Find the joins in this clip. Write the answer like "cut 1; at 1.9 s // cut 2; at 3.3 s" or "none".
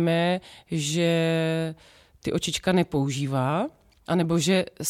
none